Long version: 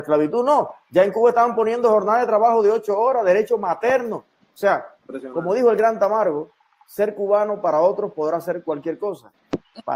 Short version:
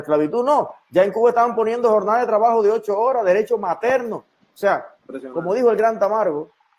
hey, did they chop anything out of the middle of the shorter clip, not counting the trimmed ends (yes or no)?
no